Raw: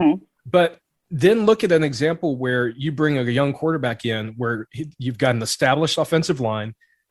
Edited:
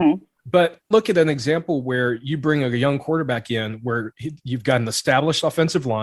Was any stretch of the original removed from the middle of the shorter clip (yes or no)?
yes